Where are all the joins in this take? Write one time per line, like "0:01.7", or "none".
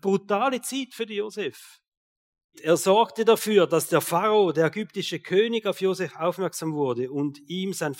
0:02.5